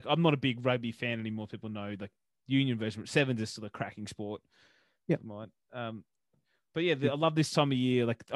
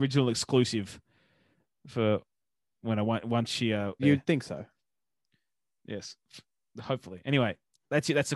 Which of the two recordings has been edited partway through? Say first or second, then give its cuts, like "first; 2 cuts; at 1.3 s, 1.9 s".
second; 1 cut; at 4.0 s